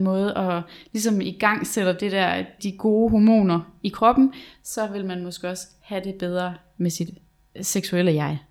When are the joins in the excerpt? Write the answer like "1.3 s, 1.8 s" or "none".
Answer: 2.6 s